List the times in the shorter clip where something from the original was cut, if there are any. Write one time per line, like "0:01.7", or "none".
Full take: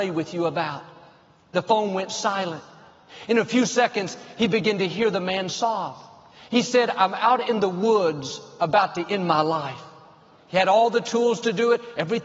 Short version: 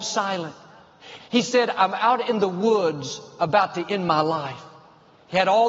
0:01.2